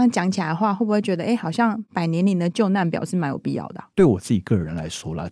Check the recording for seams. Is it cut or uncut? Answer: cut